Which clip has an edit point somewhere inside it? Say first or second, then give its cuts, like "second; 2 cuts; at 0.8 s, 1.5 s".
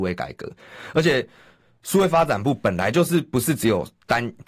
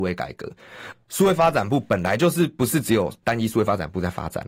second; 2 cuts; at 0.9 s, 3.2 s